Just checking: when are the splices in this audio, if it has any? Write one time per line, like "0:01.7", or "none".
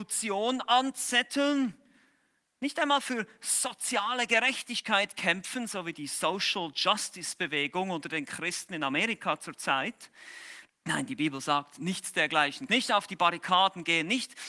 0:10.7
0:12.7